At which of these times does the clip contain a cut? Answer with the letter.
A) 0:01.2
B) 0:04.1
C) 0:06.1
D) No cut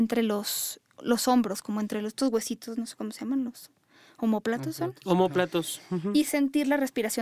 D